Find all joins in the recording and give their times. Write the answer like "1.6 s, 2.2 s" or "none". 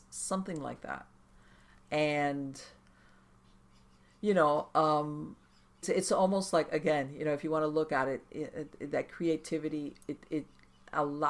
5.8 s